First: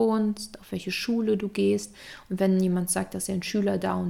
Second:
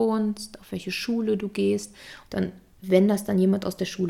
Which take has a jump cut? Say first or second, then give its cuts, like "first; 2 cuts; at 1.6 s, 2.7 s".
second; 1 cut; at 2.3 s